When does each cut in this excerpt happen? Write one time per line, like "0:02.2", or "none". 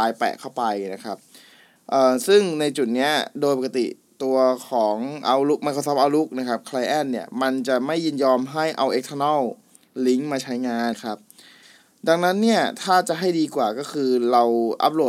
0:10.9

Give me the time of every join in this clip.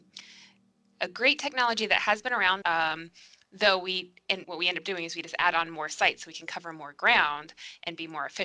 0:02.6
0:04.4

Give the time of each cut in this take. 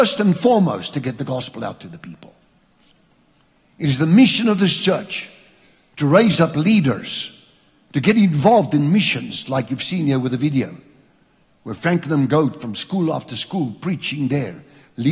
none

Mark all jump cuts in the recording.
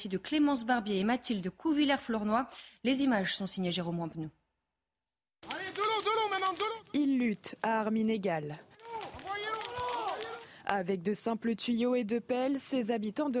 none

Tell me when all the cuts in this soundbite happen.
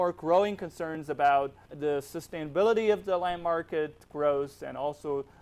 0:01.7

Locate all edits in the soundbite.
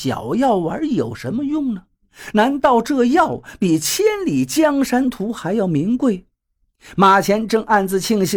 0:06.9

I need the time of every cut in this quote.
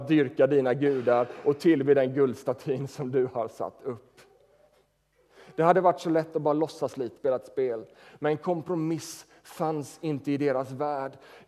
0:07.2

